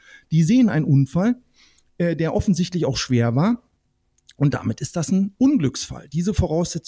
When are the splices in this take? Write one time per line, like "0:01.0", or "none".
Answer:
none